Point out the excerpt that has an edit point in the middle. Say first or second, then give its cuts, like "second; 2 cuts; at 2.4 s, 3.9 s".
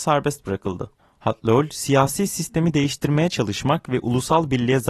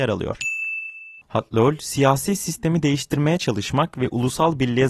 second; 1 cut; at 1.2 s